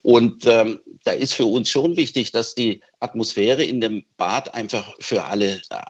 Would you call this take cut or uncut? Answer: uncut